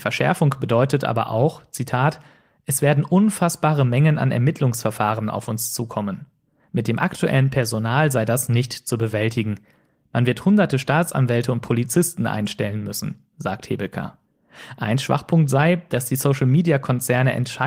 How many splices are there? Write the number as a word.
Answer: zero